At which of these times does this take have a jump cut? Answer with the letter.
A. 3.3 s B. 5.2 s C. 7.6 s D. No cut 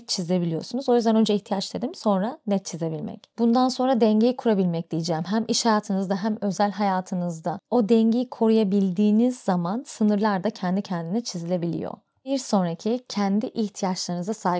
D